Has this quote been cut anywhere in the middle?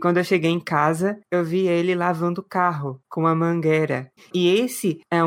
yes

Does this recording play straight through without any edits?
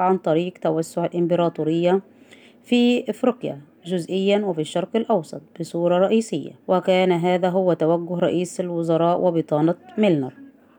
no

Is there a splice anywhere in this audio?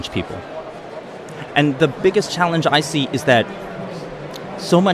yes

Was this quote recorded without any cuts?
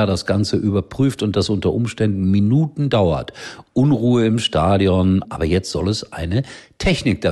no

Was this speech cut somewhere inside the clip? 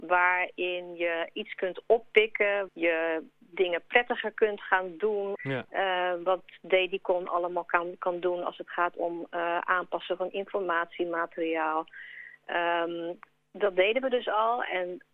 yes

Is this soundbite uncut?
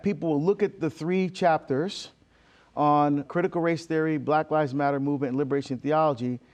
no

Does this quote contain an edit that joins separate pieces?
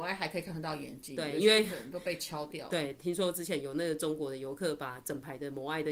no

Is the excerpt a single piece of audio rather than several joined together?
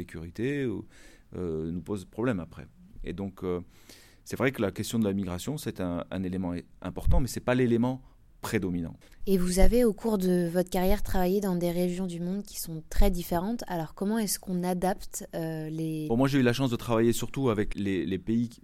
no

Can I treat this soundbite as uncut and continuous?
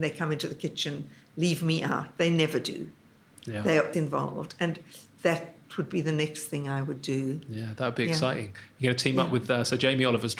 no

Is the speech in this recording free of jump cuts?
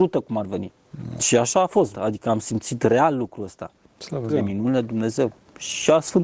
no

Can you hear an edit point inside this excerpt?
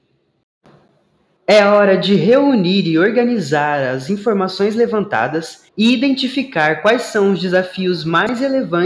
yes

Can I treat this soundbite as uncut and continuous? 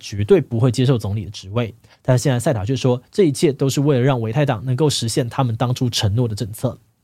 yes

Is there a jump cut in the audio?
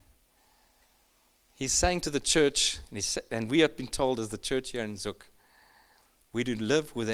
no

